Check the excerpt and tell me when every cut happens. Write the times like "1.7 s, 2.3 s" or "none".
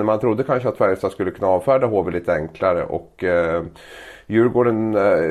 none